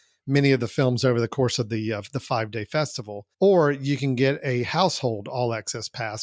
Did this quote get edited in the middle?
yes; 1 cut; at 3.3 s

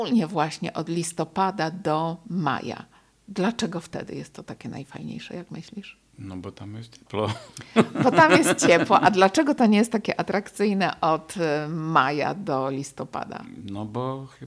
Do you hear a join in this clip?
no; 0 cuts

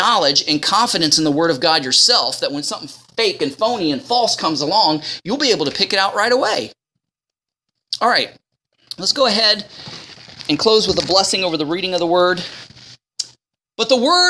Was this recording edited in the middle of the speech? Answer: no; 0 cuts

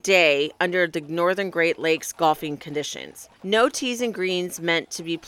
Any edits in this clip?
yes; 1 cut; at 3.3 s

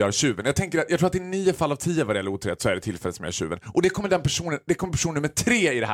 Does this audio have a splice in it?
no; 0 cuts

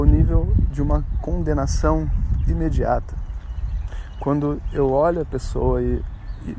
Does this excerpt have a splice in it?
no; 0 cuts

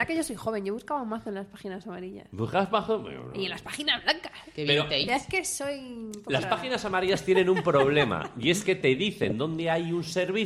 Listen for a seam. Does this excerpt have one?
no; 0 cuts

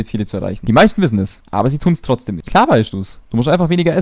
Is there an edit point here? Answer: yes; 1 cut; at 2.5 s

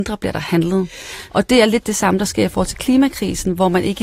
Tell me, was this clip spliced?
yes; 1 cut; at 1.3 s

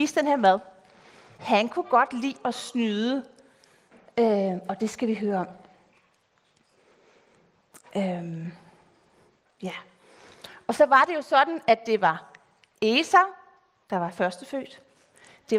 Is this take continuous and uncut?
no; 1 cut; at 1.4 s

